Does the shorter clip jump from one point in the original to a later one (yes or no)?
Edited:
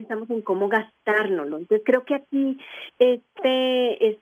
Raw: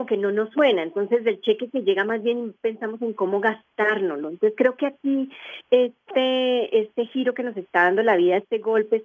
no